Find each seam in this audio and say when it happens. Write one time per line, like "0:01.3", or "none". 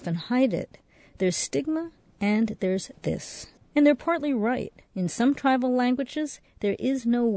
0:03.6
0:04.9